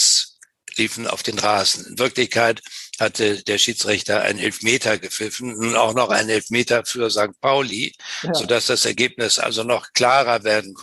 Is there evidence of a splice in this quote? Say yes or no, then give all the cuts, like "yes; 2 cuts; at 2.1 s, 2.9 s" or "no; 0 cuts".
no; 0 cuts